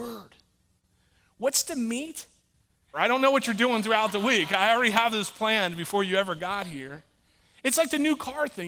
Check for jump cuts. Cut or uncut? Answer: cut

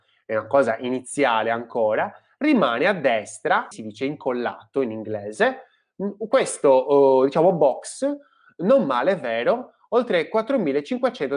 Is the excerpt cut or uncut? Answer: cut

